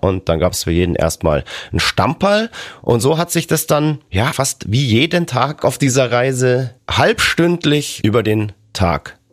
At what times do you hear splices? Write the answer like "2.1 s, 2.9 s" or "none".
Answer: 4.3 s

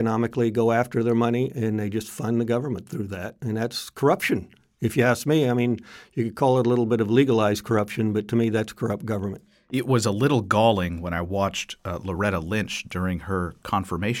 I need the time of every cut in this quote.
none

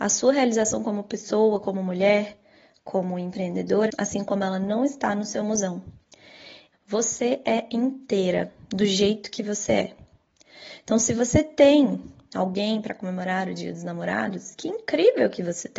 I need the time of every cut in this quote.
3.9 s, 6.7 s

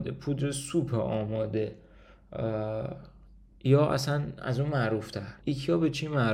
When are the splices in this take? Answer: 5.4 s

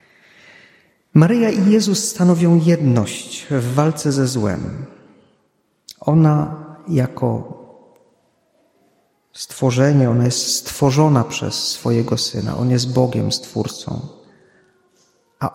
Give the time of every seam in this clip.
none

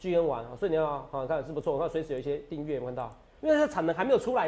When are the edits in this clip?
3.4 s

